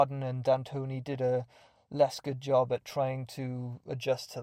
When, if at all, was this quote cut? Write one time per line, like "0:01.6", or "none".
none